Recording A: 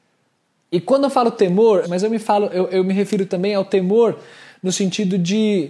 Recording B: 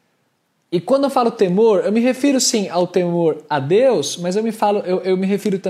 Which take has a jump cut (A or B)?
A